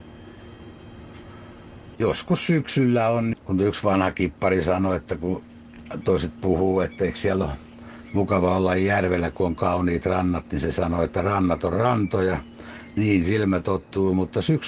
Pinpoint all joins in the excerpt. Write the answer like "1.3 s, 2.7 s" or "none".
2.0 s, 3.3 s